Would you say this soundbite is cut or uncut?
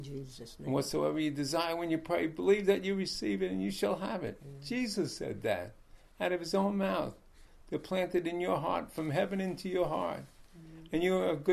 uncut